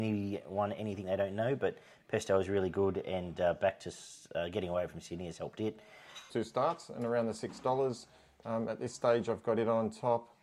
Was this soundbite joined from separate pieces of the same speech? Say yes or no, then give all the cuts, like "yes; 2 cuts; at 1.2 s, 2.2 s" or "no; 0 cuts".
yes; 1 cut; at 6.3 s